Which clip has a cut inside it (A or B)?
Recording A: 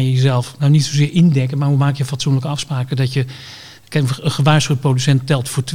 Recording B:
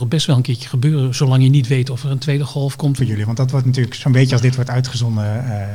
B